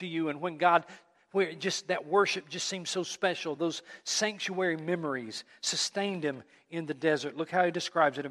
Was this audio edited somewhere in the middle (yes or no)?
no